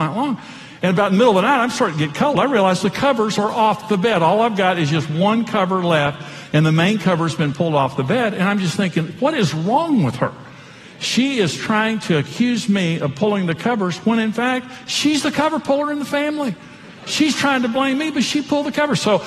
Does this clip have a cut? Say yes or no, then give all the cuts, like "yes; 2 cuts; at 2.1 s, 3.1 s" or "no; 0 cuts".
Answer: no; 0 cuts